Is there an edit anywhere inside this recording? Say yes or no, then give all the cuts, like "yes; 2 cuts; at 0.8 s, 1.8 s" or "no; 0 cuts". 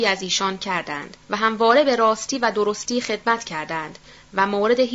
yes; 1 cut; at 1.2 s